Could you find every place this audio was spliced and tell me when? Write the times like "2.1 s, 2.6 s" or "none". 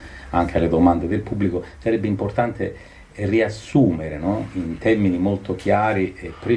none